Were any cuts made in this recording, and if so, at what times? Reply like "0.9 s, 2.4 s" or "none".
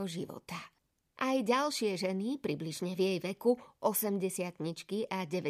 1.2 s